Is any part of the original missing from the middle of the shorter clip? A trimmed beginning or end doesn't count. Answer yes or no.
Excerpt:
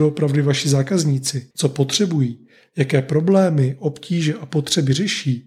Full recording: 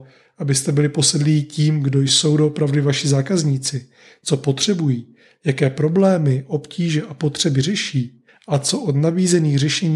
yes